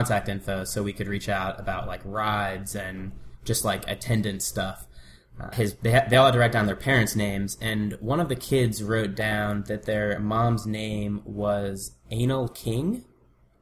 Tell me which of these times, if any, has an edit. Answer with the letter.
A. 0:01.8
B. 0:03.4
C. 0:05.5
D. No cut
C